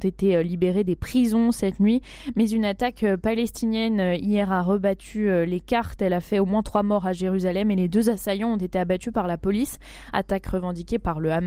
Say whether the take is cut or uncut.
uncut